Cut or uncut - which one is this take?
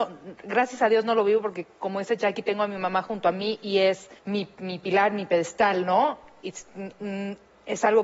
cut